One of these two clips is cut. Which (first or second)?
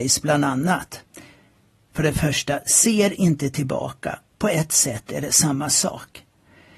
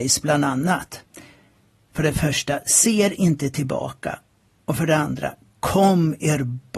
first